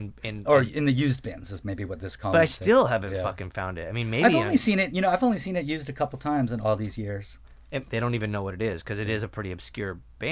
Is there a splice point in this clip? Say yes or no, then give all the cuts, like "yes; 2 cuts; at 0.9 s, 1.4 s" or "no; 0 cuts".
yes; 1 cut; at 7.9 s